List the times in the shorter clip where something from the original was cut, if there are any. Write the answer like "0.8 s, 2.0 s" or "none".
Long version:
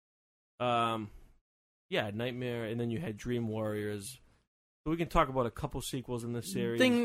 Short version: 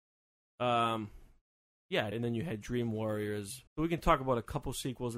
2.1 s, 3.7 s